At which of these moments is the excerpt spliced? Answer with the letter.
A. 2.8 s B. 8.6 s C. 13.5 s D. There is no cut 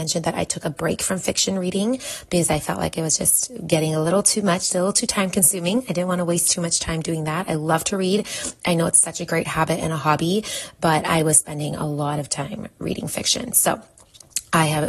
D